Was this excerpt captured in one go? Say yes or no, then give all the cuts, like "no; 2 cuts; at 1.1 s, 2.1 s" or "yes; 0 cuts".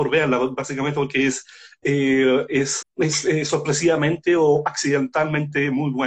no; 1 cut; at 2.8 s